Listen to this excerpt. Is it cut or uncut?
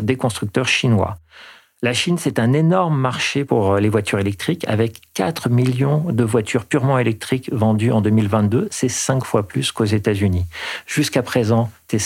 uncut